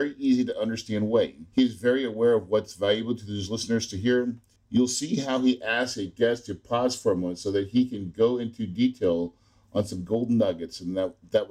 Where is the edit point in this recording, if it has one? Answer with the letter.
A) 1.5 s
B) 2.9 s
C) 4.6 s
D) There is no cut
A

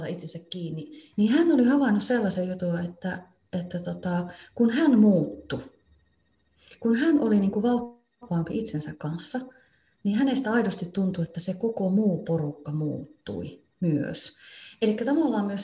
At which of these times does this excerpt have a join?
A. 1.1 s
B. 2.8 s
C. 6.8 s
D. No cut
A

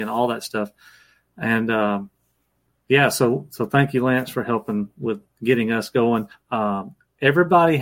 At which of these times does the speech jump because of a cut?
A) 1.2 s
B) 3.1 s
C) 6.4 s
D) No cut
C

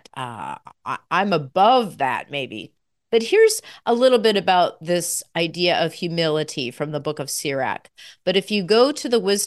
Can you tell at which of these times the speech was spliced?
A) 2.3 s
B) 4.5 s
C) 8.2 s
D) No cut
C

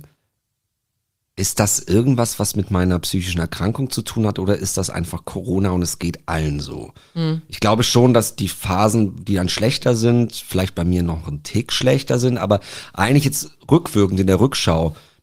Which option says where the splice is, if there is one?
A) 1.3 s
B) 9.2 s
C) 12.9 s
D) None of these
D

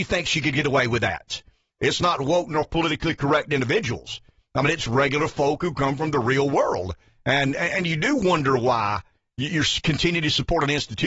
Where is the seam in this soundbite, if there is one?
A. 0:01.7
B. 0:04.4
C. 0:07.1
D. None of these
A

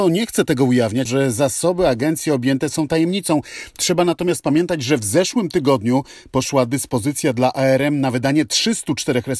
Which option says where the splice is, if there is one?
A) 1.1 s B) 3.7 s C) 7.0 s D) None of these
A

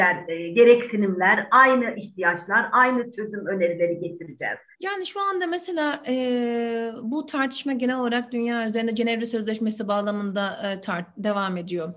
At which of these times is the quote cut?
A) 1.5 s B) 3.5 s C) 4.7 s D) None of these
C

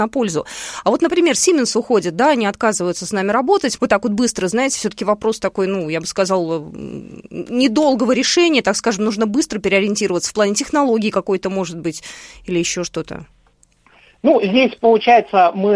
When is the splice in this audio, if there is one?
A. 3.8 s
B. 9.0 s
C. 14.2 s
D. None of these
A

